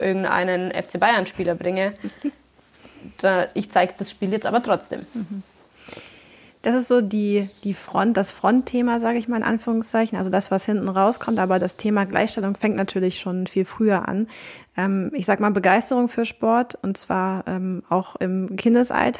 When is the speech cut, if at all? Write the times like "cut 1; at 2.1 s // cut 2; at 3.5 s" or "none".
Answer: none